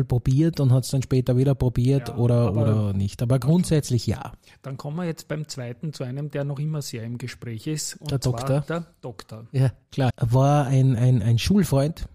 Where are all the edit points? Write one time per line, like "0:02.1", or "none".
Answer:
0:10.1

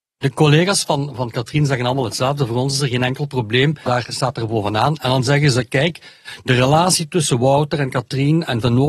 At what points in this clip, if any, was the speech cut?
0:03.9

